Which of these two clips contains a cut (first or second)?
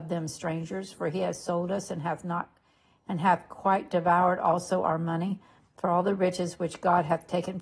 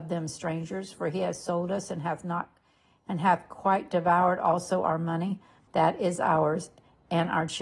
second